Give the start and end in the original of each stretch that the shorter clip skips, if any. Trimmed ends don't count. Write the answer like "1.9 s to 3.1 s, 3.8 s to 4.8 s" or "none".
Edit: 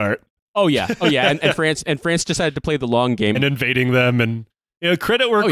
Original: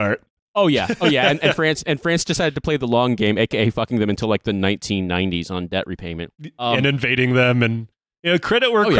3.3 s to 6.8 s